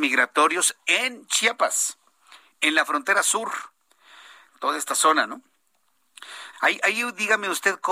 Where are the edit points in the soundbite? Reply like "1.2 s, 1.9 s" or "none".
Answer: 4.5 s, 6.5 s

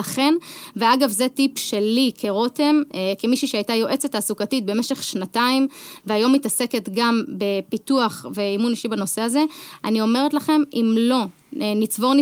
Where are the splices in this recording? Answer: none

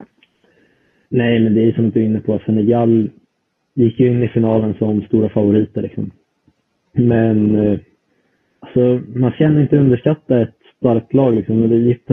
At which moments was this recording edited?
none

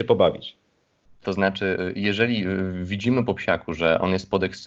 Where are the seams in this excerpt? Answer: 1.2 s

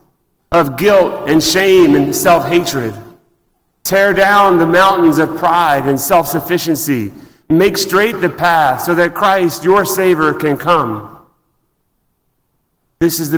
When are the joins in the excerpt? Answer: none

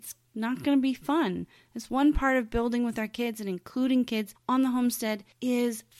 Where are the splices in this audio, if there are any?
none

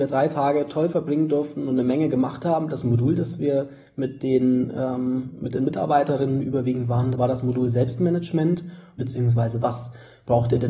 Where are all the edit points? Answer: 7.1 s, 9.0 s

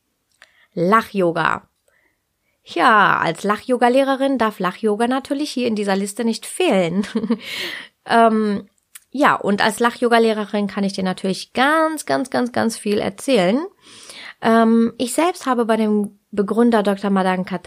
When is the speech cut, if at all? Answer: none

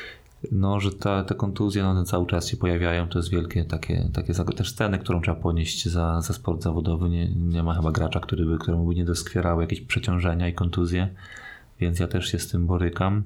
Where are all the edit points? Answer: none

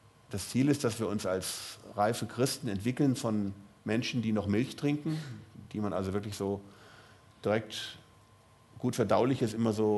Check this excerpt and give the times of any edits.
none

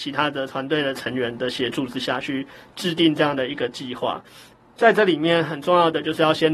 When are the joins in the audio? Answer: none

